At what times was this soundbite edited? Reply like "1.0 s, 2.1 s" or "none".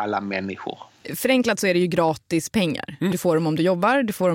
3.1 s